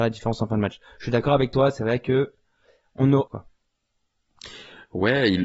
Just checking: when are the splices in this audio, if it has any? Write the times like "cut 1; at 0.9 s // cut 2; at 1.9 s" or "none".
cut 1; at 3.3 s